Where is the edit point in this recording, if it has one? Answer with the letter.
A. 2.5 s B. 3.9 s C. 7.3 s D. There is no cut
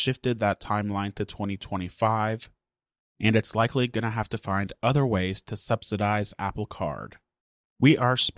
D